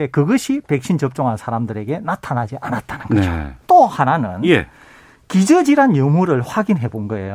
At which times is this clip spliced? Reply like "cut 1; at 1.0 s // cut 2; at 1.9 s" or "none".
cut 1; at 3.6 s